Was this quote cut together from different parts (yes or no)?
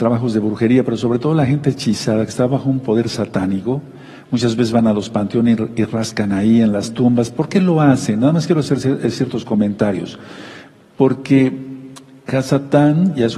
no